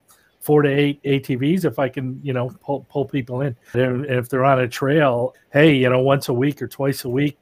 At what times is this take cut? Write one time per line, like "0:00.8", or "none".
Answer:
0:03.7
0:05.3